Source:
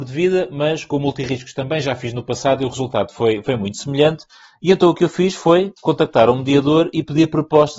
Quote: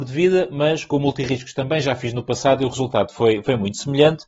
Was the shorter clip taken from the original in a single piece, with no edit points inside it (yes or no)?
yes